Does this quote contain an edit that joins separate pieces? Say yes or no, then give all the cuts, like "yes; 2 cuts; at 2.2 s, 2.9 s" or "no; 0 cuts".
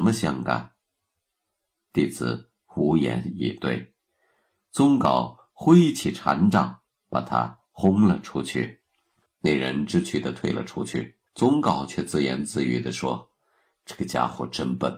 yes; 2 cuts; at 9.3 s, 11.3 s